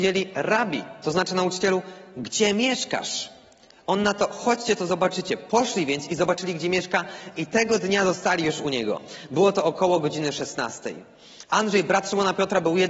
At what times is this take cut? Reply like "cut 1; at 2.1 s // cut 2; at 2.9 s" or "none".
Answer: none